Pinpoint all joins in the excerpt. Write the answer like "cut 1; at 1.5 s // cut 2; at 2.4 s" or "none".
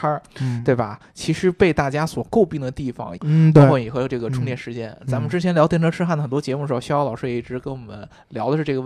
cut 1; at 3.2 s

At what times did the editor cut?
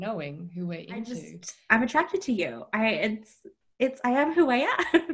none

